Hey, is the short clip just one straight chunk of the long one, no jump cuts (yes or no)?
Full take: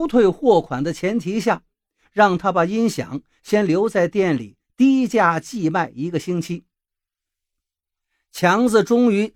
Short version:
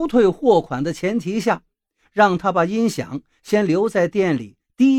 yes